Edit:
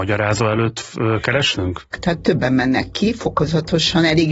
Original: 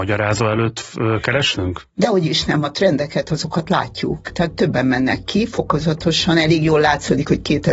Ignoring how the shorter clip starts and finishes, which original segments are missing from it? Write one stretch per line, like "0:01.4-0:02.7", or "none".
0:01.9-0:04.2